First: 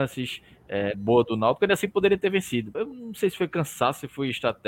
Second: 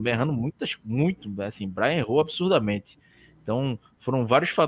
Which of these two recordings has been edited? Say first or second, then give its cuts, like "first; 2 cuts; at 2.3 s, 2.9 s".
first; 2 cuts; at 0.9 s, 2.7 s